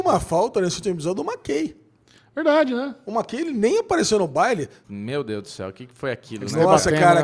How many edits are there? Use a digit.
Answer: 1